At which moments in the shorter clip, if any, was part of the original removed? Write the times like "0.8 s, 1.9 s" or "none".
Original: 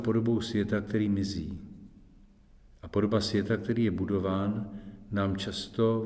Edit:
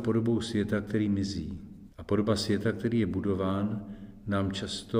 1.9 s